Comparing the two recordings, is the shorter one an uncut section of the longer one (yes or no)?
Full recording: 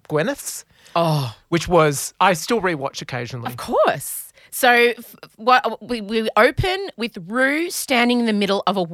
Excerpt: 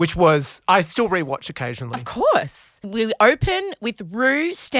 no